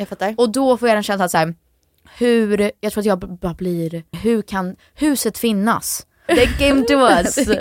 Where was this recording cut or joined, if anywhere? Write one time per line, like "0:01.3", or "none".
0:04.1
0:06.3